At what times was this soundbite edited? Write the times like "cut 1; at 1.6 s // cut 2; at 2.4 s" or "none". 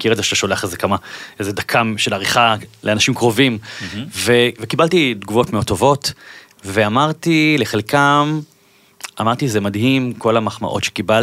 none